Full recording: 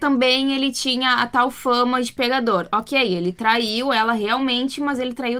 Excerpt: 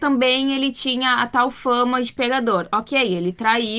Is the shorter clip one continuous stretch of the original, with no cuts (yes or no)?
yes